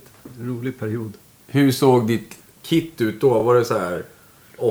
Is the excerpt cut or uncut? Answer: uncut